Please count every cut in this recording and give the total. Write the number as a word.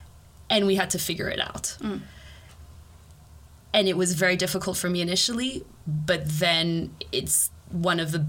zero